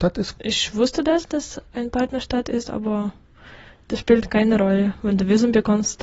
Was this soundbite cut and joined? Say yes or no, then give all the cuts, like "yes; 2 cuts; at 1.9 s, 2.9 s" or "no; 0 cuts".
no; 0 cuts